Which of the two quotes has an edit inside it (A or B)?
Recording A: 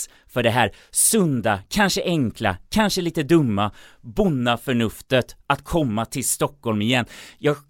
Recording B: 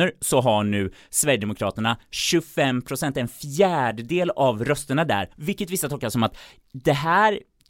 B